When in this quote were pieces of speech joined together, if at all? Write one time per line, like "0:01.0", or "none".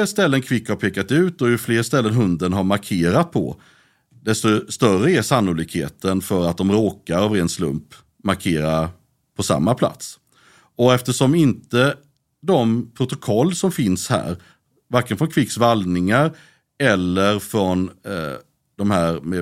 none

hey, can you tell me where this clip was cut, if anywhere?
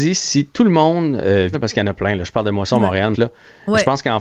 0:01.5
0:03.1

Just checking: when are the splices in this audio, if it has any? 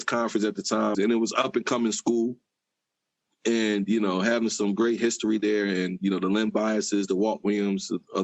0:00.9

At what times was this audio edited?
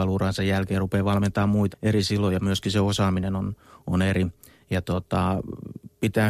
0:01.7

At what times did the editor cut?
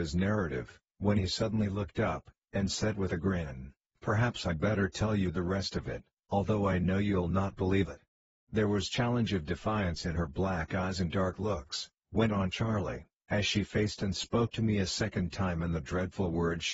none

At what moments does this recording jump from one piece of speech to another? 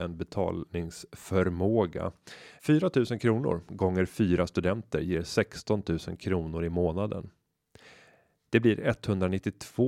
0:02.6

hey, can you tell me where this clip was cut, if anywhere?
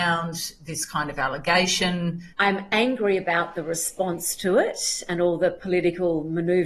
0:02.3

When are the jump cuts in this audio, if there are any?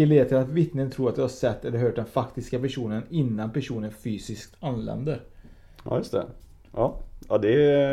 none

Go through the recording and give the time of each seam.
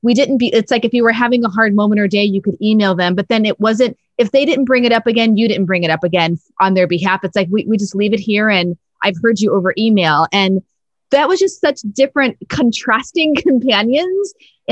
none

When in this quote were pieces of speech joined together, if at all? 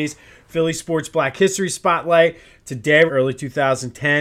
0:03.1

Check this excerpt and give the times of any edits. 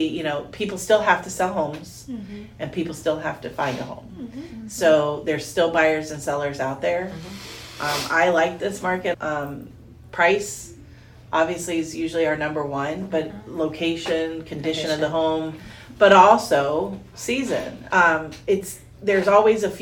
0:09.1
0:17.9

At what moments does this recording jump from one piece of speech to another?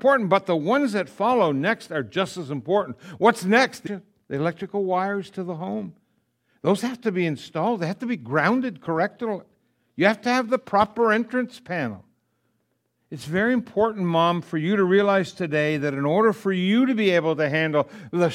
0:03.9

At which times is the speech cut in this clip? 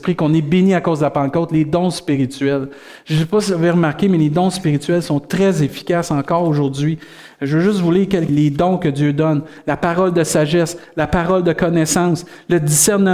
0:08.3

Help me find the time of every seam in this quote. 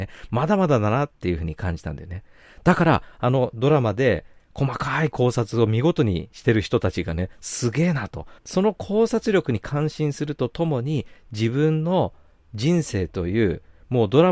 0:08.4

